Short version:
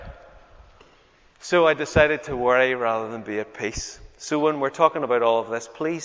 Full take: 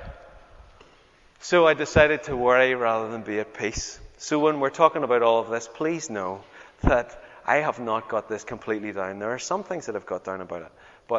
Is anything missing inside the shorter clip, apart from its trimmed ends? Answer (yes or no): no